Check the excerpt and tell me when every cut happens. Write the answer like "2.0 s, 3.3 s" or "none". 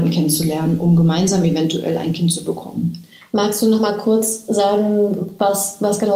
none